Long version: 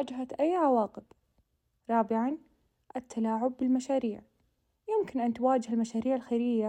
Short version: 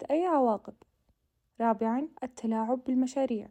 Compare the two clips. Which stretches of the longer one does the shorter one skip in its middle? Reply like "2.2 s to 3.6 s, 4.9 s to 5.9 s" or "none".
2.5 s to 2.9 s